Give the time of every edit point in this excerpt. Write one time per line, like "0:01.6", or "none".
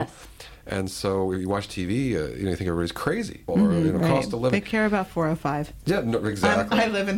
0:03.5